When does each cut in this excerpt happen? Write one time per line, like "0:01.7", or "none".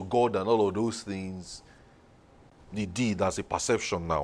0:02.6